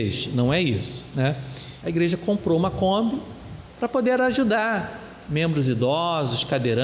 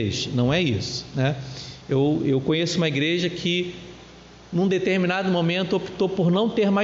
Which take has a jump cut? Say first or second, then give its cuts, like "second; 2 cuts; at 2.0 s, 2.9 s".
first; 1 cut; at 1.8 s